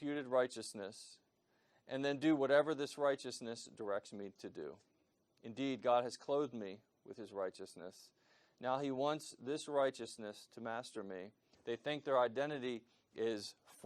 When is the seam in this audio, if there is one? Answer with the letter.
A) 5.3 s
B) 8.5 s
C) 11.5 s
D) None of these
C